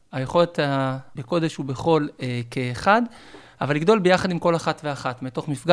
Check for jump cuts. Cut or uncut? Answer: cut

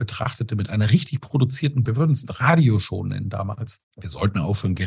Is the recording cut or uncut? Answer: cut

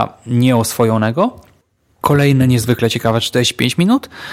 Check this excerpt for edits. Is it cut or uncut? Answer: uncut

